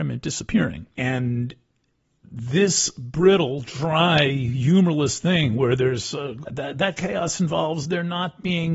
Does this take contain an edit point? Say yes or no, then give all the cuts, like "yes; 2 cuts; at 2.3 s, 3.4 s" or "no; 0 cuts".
yes; 2 cuts; at 0.9 s, 6.4 s